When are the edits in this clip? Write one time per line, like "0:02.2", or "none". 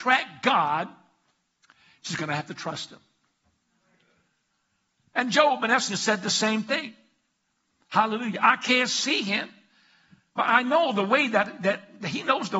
none